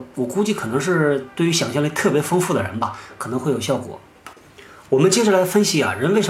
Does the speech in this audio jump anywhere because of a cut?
no; 0 cuts

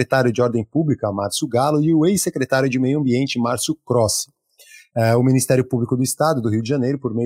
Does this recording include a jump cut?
no; 0 cuts

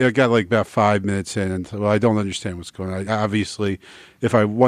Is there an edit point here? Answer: no; 0 cuts

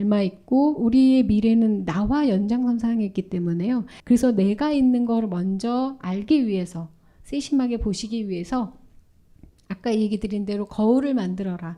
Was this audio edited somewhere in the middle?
yes; 1 cut; at 4.0 s

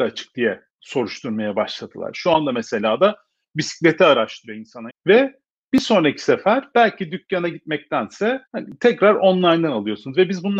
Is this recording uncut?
no; 3 cuts; at 2.1 s, 4.9 s, 8.5 s

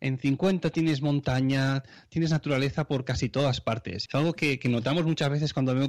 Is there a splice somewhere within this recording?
yes; 1 cut; at 4.1 s

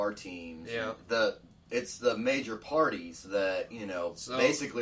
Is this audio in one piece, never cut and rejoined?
yes; 0 cuts

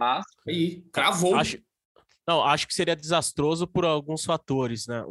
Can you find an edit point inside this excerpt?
no; 0 cuts

